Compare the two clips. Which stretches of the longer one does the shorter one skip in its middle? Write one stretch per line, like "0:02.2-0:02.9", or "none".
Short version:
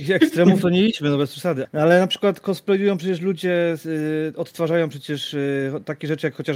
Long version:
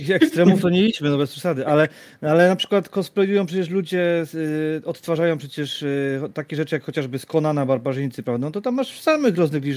0:01.6-0:02.1